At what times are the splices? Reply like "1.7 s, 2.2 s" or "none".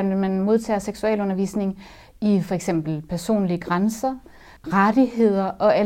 4.6 s